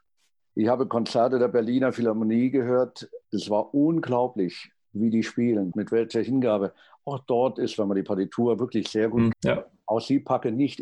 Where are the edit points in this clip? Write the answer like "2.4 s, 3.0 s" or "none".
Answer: 3.2 s, 5.7 s, 9.3 s